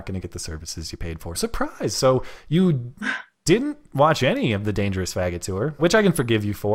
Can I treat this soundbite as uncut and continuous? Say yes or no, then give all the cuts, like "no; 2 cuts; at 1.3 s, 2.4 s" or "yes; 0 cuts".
no; 2 cuts; at 1.3 s, 5.8 s